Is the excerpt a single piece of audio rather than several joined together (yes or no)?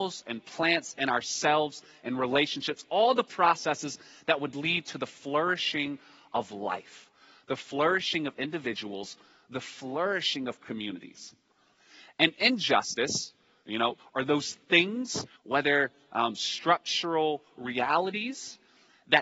no